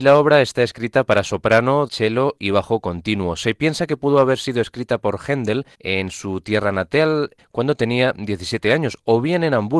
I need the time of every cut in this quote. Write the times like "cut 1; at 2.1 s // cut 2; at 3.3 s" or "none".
cut 1; at 1.9 s // cut 2; at 5.7 s // cut 3; at 7.4 s